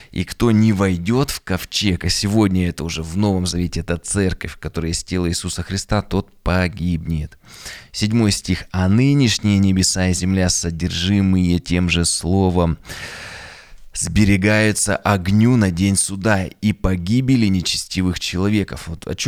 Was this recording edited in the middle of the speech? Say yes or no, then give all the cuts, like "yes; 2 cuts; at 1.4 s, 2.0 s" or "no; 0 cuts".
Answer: no; 0 cuts